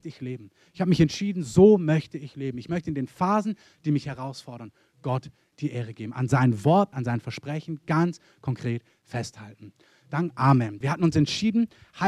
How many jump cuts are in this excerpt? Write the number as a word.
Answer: two